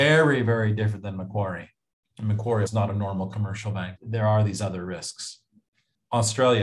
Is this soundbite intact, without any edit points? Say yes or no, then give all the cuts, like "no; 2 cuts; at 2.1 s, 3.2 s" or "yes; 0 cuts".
no; 2 cuts; at 2.7 s, 4.0 s